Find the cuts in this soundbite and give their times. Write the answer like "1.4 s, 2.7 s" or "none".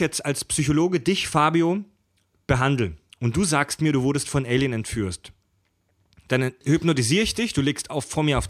none